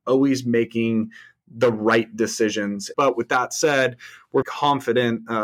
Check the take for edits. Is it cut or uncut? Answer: cut